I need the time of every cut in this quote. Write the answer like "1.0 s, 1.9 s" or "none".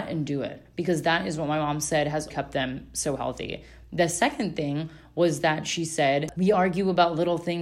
2.3 s, 6.3 s